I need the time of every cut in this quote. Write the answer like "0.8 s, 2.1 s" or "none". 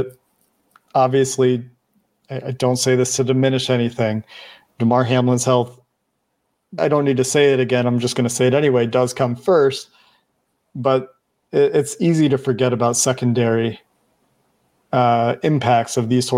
6.8 s